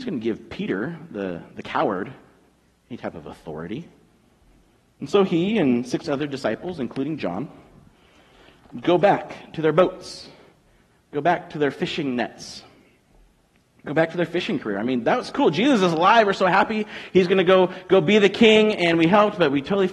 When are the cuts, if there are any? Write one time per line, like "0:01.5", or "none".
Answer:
none